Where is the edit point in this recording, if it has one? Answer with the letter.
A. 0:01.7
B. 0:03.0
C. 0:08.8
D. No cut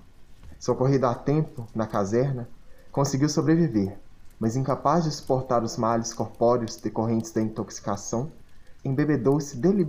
C